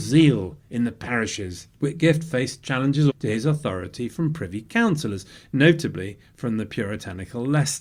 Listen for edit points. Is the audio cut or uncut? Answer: cut